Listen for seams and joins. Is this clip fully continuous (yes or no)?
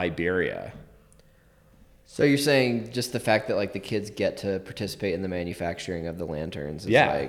yes